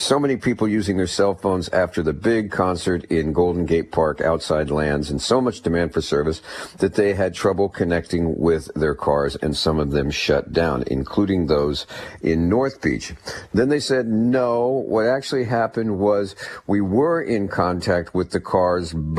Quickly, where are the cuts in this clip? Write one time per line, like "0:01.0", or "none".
none